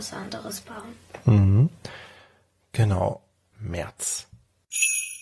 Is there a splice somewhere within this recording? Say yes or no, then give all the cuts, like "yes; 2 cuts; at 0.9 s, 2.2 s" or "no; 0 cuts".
yes; 1 cut; at 3.5 s